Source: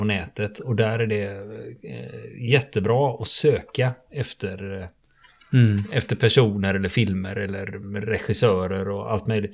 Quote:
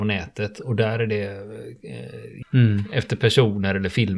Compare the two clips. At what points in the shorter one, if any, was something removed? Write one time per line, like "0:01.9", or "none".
0:02.4